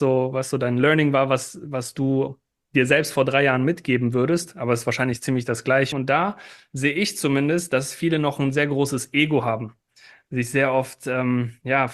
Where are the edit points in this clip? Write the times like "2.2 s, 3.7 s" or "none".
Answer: 5.9 s

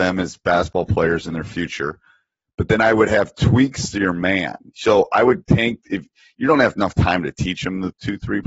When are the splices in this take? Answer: 4.7 s

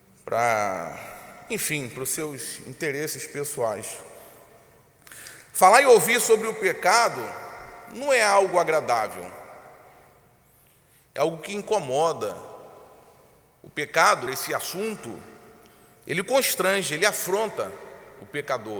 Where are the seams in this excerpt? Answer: 14.3 s

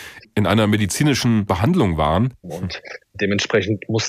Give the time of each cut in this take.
2.4 s

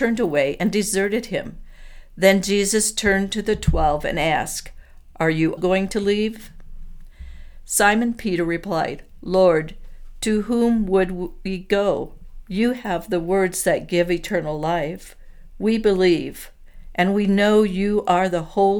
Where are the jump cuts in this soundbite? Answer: 5.6 s

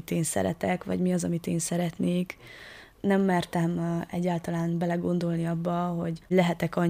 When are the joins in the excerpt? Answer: none

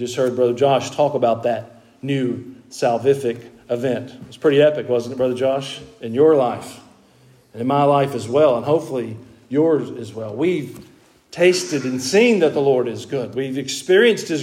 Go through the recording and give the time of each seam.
none

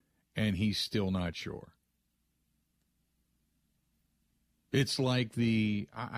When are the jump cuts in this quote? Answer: none

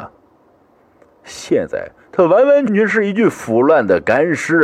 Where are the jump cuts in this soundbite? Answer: 2.7 s

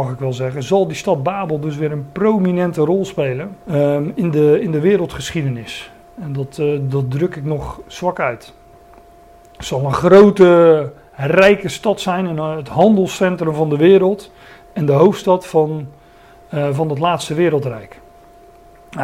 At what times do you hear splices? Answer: 3.6 s

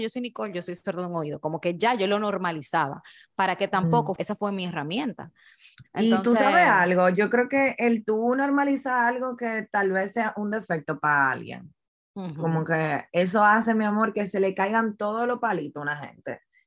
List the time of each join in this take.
4.2 s

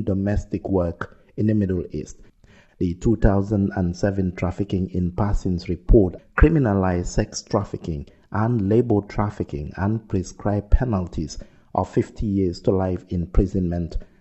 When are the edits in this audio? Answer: 2.7 s, 6.2 s

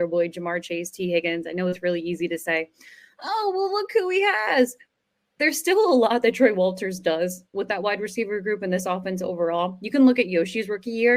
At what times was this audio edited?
none

